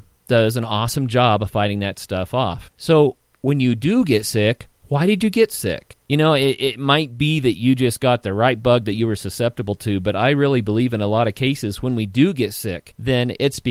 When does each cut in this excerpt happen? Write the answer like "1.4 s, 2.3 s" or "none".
6.0 s

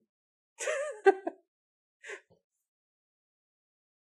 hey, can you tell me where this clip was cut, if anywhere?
2.3 s

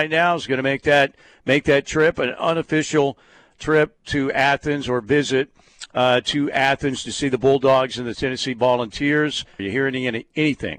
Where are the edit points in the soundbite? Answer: 9.6 s

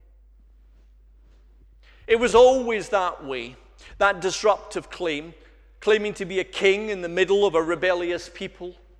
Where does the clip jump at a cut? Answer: none

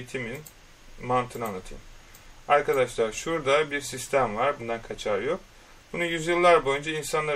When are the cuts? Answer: 4.6 s

